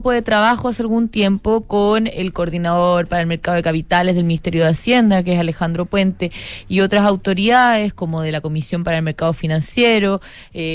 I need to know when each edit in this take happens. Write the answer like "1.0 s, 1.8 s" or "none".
none